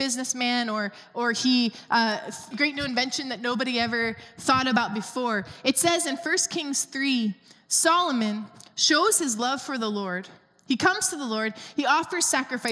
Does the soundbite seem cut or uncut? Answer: cut